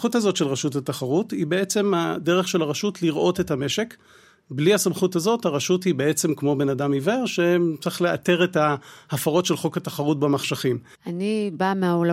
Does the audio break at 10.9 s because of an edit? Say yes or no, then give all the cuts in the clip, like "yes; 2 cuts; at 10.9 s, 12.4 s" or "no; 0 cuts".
yes; 1 cut; at 10.9 s